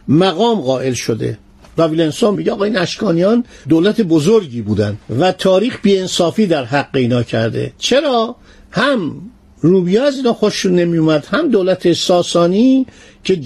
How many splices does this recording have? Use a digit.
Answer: 2